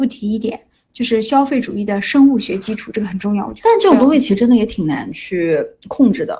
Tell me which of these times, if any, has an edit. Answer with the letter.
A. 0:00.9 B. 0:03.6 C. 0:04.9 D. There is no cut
B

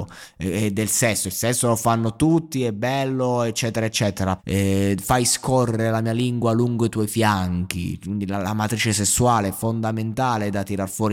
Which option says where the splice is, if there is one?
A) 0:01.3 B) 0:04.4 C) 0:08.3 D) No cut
B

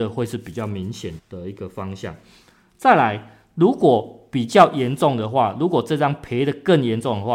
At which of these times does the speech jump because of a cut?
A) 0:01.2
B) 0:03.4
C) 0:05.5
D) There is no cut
A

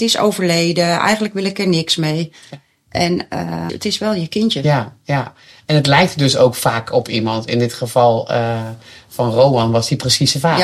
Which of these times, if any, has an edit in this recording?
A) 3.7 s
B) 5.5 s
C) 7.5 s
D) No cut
A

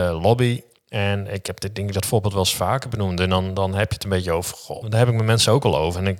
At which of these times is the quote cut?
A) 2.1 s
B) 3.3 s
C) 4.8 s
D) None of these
C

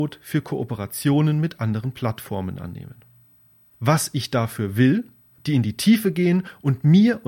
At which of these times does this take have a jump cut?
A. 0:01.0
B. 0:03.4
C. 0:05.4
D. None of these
C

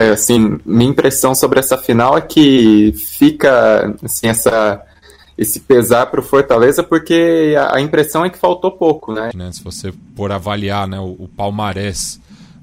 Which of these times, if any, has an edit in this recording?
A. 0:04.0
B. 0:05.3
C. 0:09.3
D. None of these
C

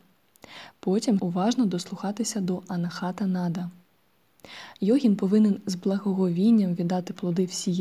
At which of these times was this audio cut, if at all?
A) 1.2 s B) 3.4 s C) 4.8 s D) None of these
A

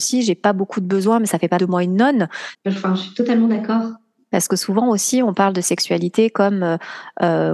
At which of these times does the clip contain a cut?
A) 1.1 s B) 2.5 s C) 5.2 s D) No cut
B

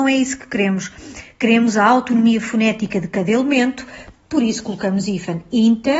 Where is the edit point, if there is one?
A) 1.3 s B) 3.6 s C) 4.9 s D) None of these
D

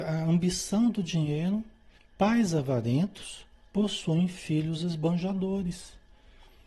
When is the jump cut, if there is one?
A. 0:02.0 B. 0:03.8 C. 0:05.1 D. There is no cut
A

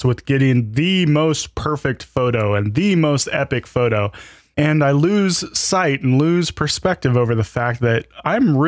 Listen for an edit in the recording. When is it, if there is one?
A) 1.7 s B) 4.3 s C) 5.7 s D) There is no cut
D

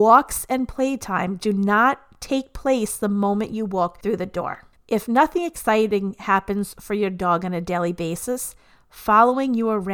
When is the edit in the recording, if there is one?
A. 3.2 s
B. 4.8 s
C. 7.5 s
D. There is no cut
B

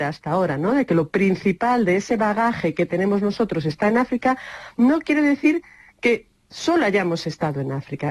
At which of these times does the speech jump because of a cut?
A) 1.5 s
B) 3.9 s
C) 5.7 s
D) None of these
D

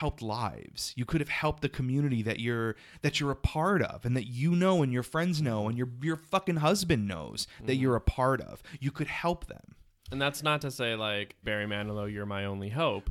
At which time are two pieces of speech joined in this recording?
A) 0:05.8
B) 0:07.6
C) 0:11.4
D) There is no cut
C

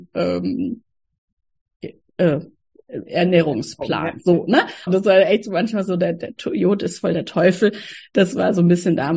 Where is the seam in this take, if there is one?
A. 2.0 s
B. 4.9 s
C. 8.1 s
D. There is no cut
B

